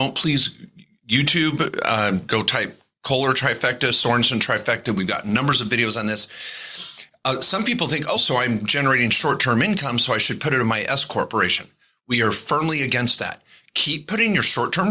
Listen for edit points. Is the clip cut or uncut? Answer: cut